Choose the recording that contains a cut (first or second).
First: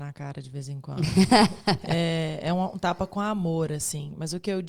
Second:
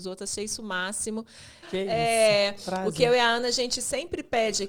second